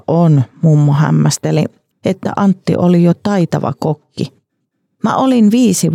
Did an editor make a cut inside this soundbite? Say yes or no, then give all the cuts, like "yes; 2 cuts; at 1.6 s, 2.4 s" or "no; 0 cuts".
yes; 1 cut; at 1.9 s